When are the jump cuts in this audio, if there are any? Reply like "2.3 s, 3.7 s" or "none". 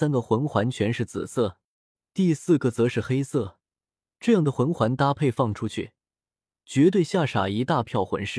none